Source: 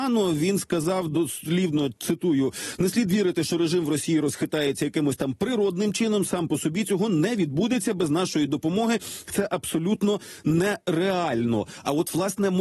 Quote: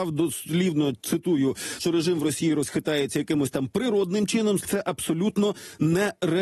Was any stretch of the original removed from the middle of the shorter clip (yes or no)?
yes